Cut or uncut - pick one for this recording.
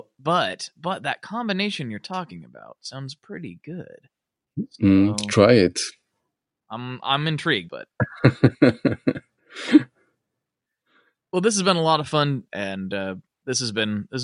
cut